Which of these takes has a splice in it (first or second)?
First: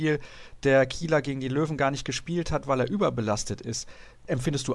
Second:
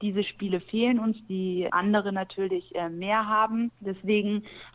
second